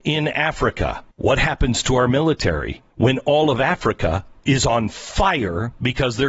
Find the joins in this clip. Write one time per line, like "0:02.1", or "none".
0:01.1
0:02.9